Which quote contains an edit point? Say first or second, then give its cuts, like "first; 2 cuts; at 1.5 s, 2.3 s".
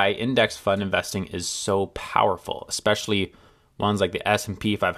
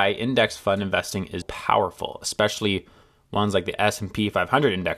second; 1 cut; at 1.4 s